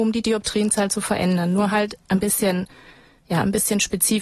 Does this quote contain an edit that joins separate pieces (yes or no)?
no